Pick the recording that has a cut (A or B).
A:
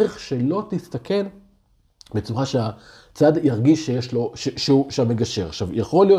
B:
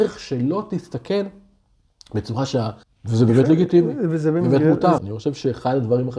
B